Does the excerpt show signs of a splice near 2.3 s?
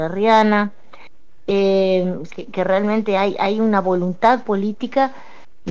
yes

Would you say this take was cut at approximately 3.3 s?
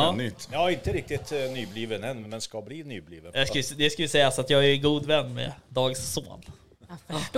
yes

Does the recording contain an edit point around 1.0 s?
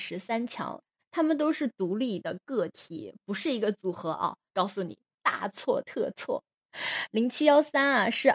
yes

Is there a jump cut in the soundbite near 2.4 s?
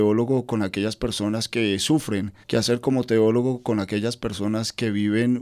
yes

